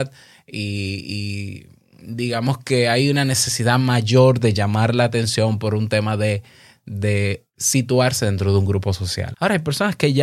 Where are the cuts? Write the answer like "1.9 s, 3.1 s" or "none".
9.3 s

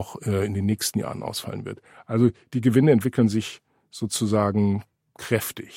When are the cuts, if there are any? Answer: none

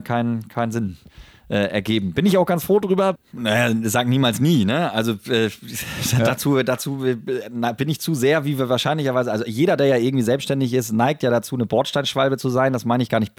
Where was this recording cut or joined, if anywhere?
3.2 s

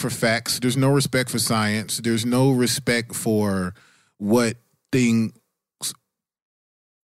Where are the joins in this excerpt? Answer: none

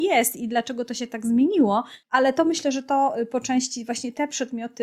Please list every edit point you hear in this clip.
2.0 s

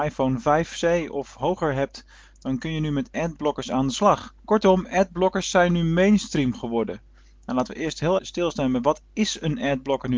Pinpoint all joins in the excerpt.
4.4 s, 8.2 s

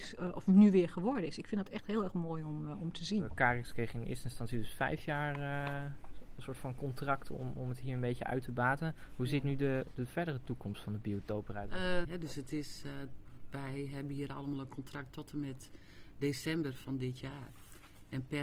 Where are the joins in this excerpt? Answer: 12.0 s

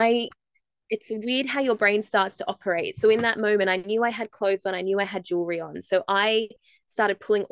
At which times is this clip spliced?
none

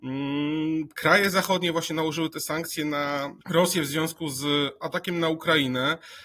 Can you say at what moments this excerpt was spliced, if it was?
3.4 s

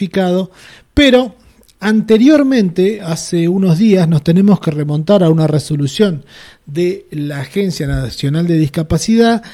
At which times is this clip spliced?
none

